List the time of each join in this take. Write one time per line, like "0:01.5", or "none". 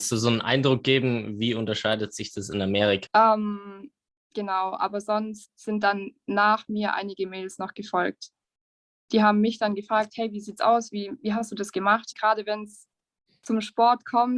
0:03.1
0:12.1